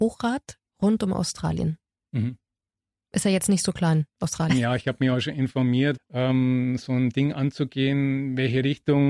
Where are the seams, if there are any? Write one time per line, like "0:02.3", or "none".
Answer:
0:04.5
0:06.0